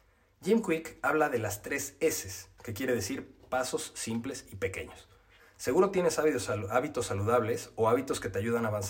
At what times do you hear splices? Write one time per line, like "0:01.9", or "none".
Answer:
0:02.6
0:05.4